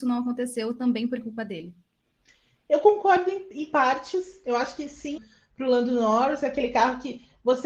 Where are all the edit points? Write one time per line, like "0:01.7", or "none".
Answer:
0:05.2